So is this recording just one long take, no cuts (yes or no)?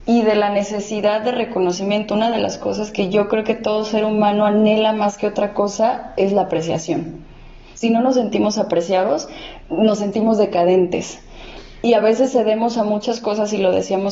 yes